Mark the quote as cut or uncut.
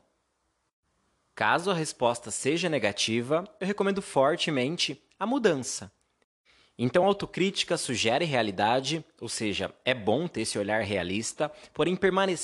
uncut